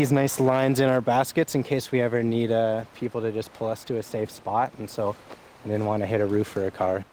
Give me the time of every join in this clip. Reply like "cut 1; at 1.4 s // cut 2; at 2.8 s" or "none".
none